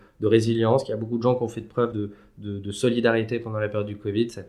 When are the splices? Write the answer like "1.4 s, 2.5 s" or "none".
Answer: none